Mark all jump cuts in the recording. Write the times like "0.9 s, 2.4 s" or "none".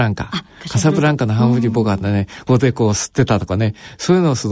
2.5 s